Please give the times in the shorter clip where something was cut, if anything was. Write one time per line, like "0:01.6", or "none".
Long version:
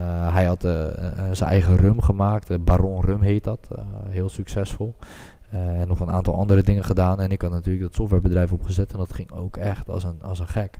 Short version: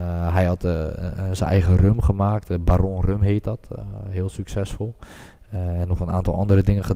none